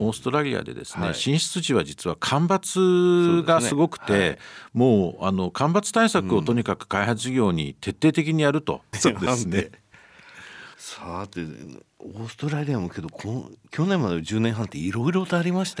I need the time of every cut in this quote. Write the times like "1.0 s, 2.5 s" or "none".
8.9 s, 10.7 s